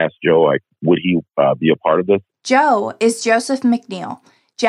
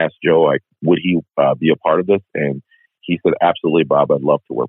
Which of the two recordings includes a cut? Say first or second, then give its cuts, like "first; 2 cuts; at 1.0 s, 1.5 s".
first; 1 cut; at 2.3 s